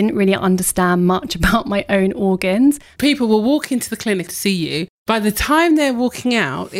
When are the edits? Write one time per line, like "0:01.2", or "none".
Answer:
0:03.0